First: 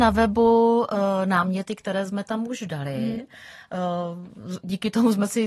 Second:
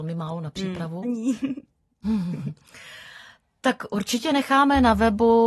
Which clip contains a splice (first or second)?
second